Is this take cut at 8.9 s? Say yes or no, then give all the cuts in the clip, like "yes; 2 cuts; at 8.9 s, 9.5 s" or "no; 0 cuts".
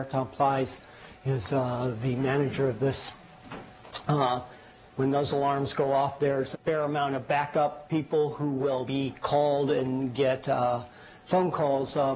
yes; 2 cuts; at 6.5 s, 8.9 s